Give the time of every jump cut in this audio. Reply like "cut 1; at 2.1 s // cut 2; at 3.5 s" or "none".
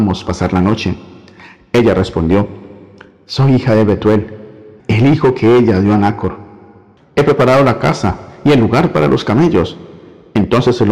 cut 1; at 4.8 s // cut 2; at 7.0 s